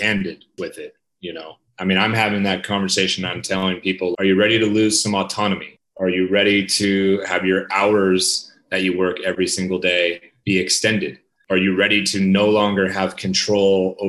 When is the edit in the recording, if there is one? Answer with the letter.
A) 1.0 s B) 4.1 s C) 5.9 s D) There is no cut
B